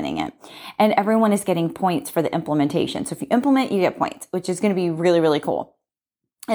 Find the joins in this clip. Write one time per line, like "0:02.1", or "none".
none